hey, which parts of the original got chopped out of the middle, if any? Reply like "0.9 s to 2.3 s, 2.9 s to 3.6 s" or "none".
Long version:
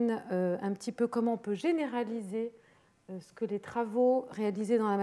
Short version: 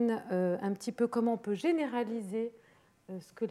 none